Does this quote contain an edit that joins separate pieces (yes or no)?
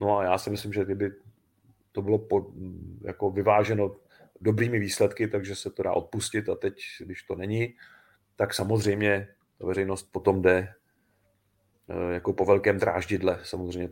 no